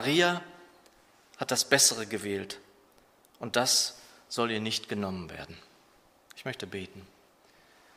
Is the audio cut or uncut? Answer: uncut